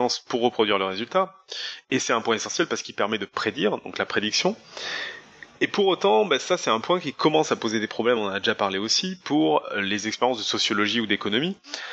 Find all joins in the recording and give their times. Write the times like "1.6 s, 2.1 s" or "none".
none

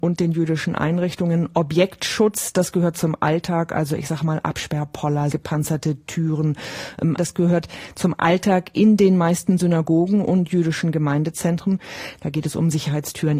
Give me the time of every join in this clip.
5.3 s, 7.2 s, 12.2 s

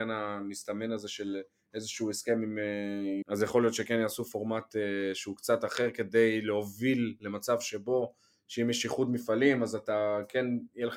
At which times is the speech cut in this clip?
3.2 s

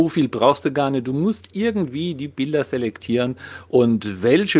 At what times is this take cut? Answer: none

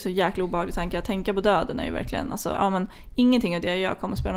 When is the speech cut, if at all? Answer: 2.5 s

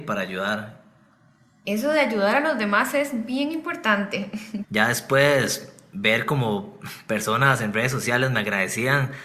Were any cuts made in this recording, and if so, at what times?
4.6 s

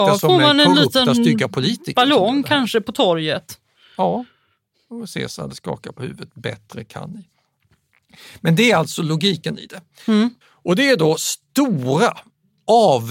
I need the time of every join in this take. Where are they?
10.4 s

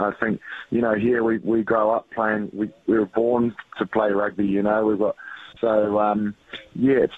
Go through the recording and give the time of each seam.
5.6 s

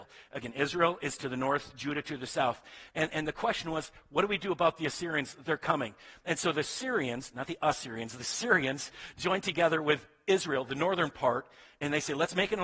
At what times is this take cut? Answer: none

